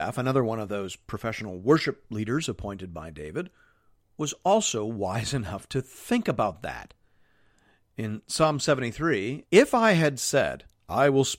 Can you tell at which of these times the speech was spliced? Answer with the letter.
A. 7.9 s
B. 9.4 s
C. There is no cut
B